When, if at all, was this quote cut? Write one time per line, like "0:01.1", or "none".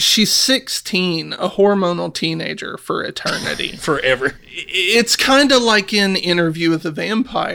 0:04.4